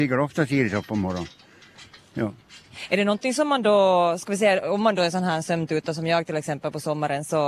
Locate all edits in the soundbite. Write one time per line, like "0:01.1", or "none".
none